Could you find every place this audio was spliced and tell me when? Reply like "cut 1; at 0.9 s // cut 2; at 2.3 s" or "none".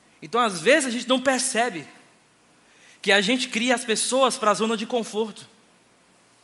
none